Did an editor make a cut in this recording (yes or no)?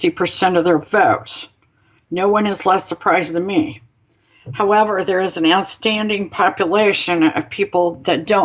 no